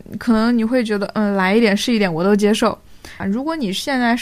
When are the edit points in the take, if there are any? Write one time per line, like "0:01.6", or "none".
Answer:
0:03.2